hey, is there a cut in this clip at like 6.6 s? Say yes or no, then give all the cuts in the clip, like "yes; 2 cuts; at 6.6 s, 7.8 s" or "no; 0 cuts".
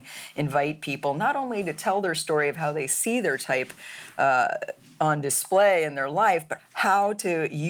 yes; 1 cut; at 6.6 s